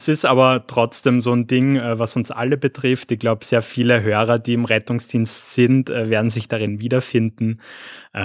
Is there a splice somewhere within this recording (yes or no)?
no